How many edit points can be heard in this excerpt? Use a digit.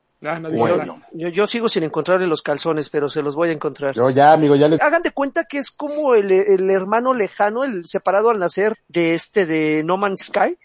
2